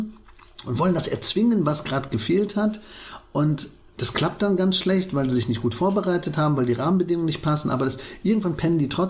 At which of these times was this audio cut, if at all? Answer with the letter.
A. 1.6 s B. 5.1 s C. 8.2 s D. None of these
D